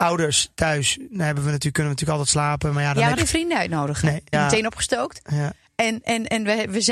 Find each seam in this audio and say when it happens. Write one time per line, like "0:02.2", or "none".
0:03.2
0:04.3